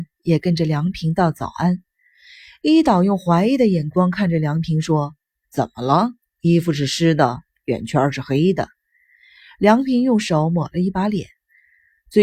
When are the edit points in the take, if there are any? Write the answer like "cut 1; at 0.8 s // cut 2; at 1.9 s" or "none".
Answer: none

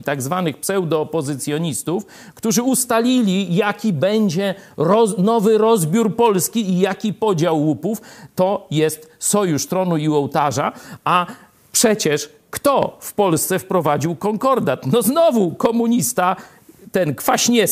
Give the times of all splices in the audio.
none

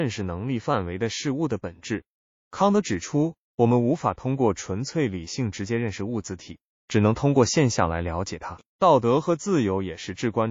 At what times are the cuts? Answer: cut 1; at 8.7 s

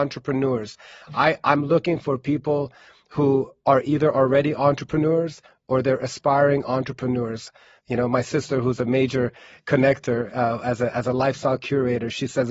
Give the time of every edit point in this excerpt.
cut 1; at 7.8 s

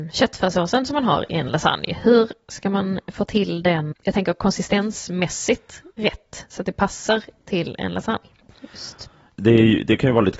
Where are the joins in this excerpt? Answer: cut 1; at 3.9 s

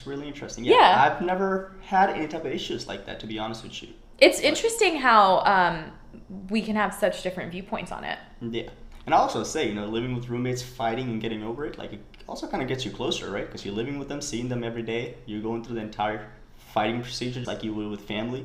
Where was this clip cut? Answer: cut 1; at 17.4 s

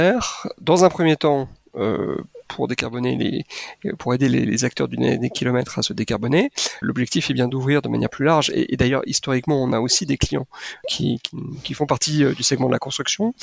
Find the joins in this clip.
cut 1; at 6.8 s // cut 2; at 10.8 s

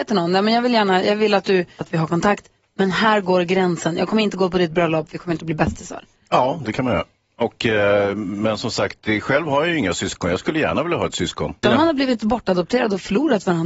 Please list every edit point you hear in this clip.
cut 1; at 1.8 s // cut 2; at 11.6 s

